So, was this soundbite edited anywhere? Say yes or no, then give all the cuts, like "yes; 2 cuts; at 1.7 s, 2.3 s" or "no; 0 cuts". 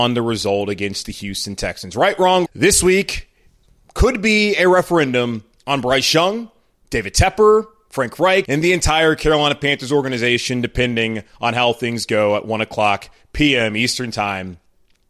yes; 2 cuts; at 2.4 s, 8.4 s